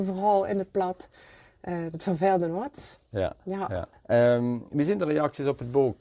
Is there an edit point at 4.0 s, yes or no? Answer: no